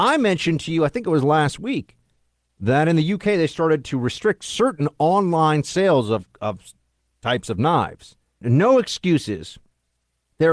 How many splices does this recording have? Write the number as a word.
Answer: one